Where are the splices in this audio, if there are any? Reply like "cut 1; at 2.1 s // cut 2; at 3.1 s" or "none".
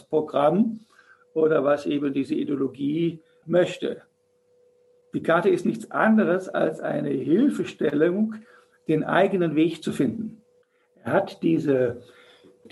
none